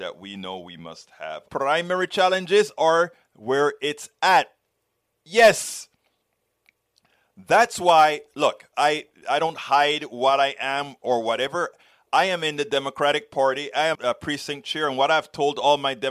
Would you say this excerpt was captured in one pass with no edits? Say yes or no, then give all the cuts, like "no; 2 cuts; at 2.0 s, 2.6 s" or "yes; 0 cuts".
no; 2 cuts; at 1.5 s, 13.9 s